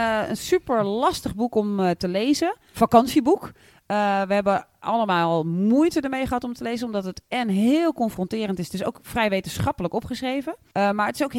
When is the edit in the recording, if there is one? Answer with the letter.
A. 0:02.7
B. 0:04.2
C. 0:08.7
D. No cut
A